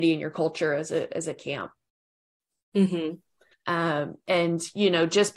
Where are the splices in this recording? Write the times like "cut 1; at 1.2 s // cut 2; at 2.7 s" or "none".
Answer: cut 1; at 3.5 s